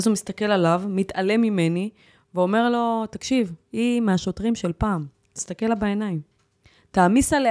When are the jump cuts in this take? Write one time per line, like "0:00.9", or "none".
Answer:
none

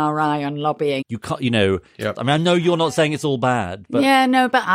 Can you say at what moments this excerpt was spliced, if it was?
0:01.0
0:02.2

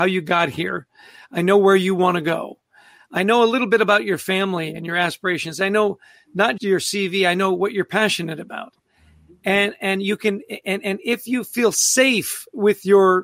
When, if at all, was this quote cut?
0:06.6

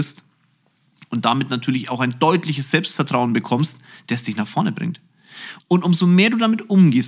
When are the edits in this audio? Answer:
0:05.6

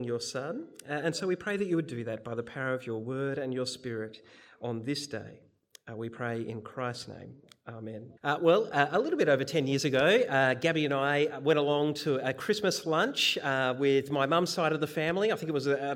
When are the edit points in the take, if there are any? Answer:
0:08.2

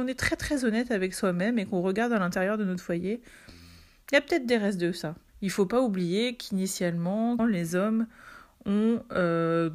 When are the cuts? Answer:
0:05.3
0:07.4

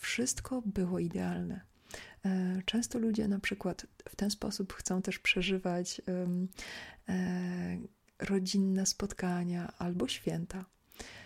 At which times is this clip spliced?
none

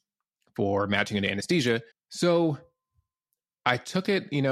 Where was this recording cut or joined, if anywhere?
0:01.9

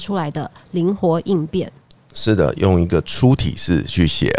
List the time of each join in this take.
none

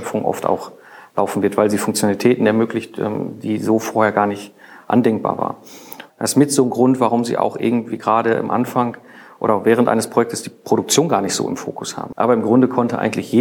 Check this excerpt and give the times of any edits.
0:06.1
0:12.1

